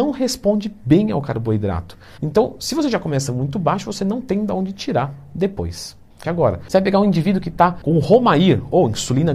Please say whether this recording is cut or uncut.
cut